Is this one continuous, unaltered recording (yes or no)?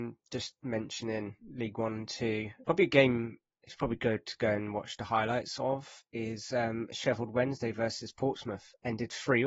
no